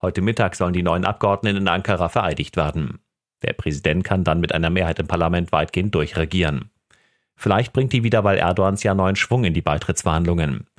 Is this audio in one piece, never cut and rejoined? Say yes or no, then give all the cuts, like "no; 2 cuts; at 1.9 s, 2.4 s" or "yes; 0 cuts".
yes; 0 cuts